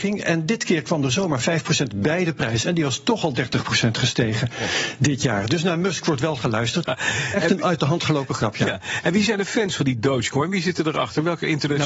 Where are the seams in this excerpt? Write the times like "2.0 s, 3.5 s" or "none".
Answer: 6.8 s